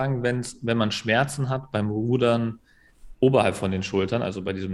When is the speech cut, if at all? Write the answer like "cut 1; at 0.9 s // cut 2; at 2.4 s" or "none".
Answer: cut 1; at 3.1 s